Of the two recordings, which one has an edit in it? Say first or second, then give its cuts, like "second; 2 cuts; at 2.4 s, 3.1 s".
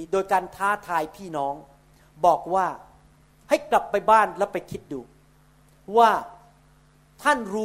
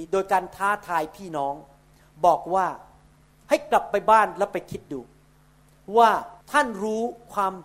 second; 1 cut; at 6.4 s